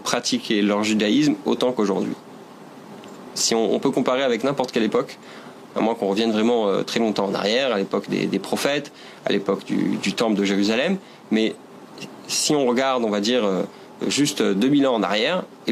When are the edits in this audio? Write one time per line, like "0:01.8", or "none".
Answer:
0:10.0
0:14.0